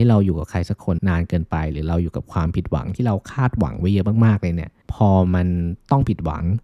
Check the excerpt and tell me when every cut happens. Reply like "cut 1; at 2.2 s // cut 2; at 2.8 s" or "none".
cut 1; at 1.0 s // cut 2; at 4.8 s